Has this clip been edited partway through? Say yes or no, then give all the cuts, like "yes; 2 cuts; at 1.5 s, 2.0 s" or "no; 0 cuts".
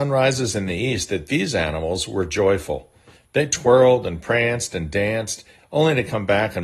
yes; 2 cuts; at 3.2 s, 5.6 s